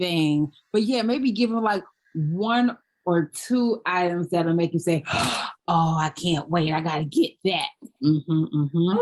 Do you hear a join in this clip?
no; 0 cuts

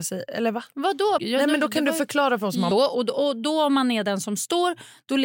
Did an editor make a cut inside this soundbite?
yes; 2 cuts; at 1.2 s, 2.7 s

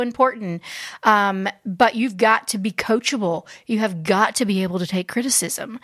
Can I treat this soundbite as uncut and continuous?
yes; 0 cuts

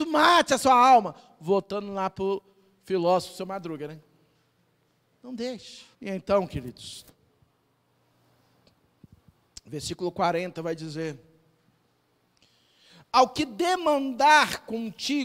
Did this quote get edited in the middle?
yes; 1 cut; at 5.9 s

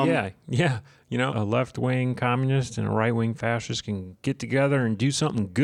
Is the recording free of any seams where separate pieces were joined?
no; 1 cut; at 1.3 s

